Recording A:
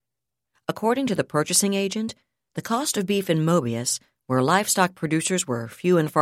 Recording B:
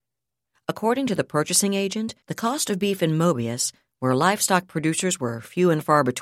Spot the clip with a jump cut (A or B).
B